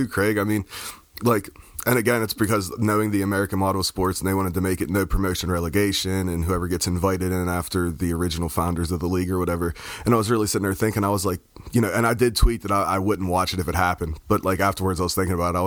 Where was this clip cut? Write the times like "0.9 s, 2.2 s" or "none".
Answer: none